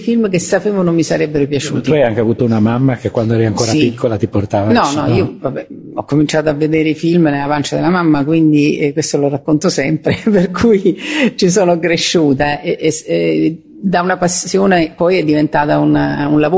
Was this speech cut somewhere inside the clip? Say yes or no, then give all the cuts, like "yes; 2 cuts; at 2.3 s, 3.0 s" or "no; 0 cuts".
no; 0 cuts